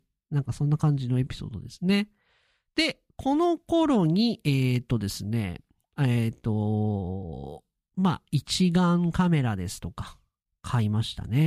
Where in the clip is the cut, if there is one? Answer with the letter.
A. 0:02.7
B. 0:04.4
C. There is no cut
C